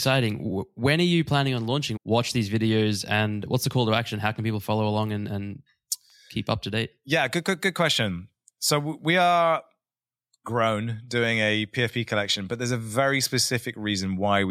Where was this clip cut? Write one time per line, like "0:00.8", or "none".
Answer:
0:02.0